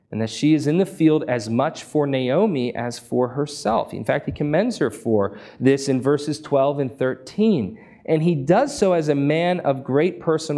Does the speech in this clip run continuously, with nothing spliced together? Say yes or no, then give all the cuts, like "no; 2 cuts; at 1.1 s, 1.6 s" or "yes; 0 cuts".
yes; 0 cuts